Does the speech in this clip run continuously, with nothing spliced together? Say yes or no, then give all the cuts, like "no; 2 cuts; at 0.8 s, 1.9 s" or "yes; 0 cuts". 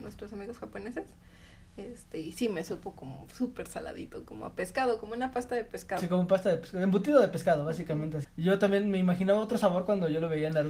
no; 1 cut; at 8.2 s